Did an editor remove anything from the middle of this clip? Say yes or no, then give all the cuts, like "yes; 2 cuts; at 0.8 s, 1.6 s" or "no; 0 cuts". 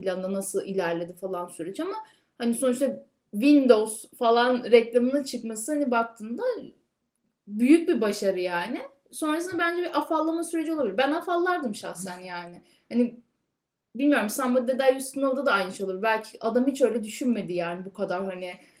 no; 0 cuts